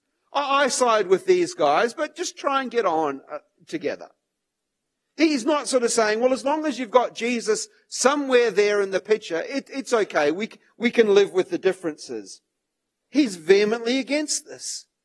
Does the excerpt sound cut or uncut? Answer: uncut